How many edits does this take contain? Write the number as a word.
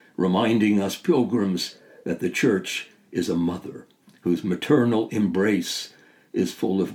zero